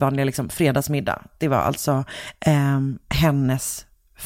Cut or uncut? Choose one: uncut